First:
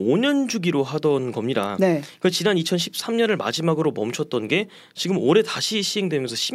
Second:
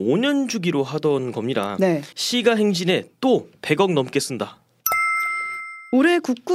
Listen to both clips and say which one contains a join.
second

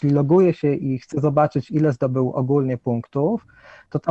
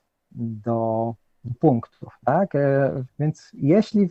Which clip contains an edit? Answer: second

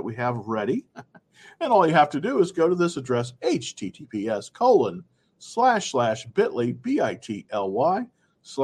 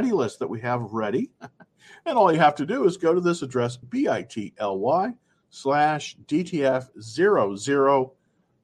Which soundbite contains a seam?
second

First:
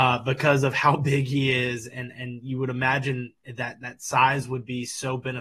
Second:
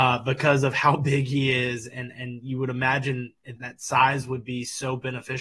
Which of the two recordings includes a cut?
second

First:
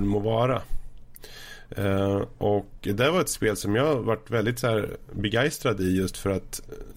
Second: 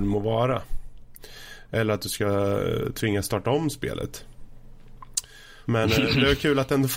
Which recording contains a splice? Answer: second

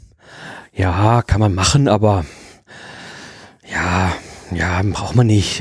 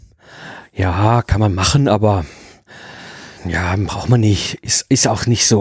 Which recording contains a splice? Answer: second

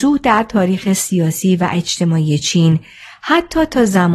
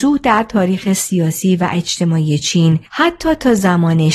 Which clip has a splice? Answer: second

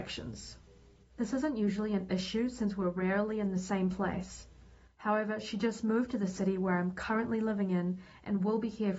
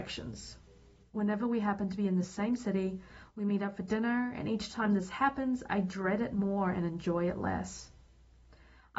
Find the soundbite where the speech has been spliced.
first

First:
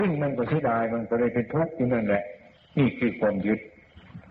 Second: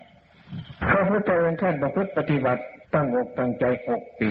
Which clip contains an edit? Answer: second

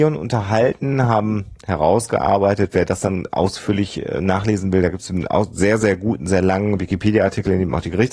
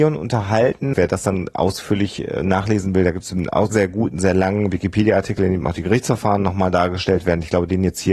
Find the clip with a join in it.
second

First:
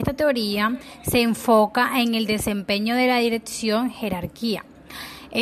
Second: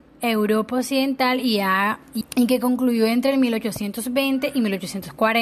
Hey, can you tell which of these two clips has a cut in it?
second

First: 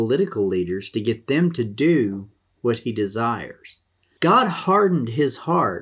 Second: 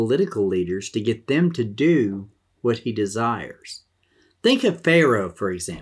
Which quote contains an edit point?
first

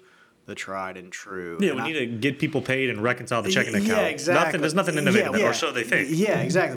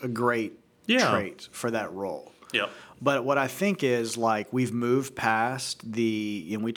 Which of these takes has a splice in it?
first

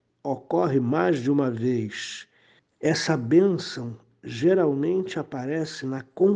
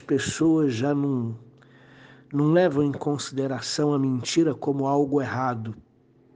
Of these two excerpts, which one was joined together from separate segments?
first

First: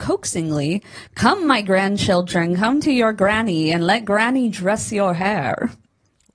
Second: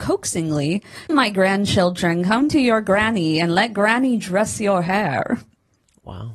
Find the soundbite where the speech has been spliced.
second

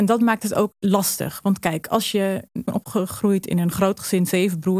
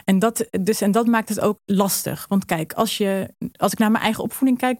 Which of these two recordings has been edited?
first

